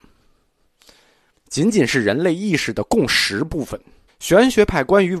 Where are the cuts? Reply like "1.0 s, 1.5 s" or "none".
1.3 s, 4.1 s

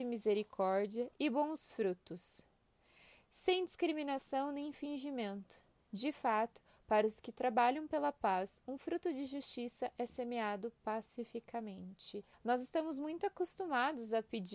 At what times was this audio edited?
12.3 s

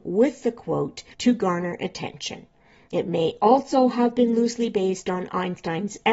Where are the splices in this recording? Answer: none

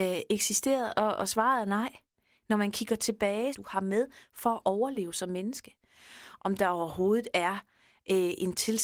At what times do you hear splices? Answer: 3.5 s, 6.4 s

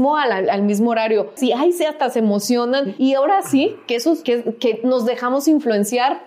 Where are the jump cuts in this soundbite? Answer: 1.4 s

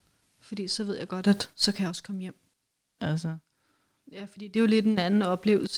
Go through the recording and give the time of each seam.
3.0 s

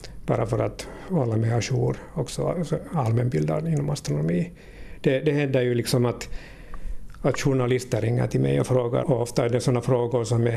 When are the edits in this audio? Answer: 9.0 s

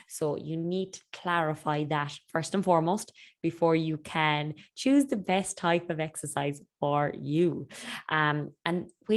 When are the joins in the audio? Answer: 8.0 s

